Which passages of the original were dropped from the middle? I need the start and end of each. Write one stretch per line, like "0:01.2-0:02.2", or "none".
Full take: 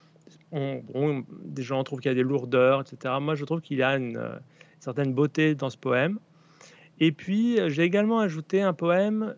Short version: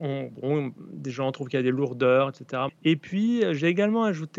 0:03.2-0:06.8